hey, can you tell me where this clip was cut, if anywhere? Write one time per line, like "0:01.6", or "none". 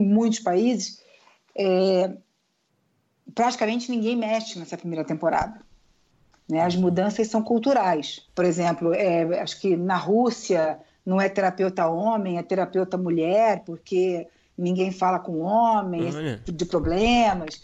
0:08.3